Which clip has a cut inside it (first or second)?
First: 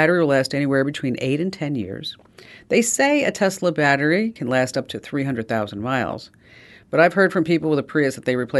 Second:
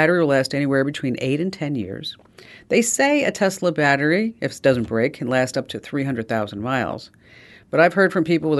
first